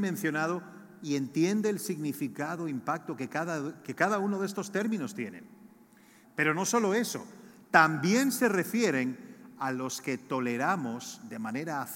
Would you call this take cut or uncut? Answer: cut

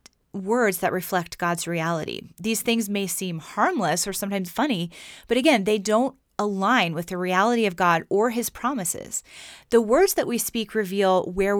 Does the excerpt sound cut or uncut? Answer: cut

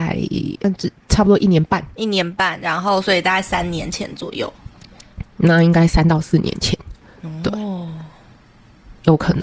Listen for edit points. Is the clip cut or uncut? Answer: uncut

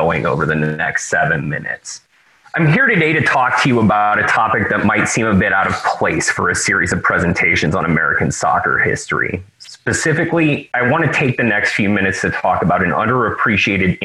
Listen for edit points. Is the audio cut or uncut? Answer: uncut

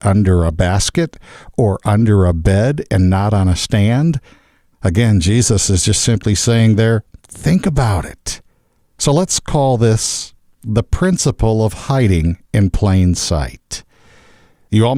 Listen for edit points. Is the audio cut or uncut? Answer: cut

